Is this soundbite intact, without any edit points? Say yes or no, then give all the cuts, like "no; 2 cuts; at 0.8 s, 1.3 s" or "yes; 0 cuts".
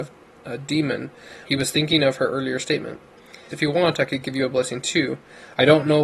no; 2 cuts; at 1.4 s, 3.5 s